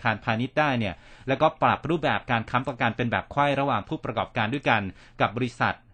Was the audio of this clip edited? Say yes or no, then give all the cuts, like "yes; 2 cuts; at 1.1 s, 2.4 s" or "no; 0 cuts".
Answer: no; 0 cuts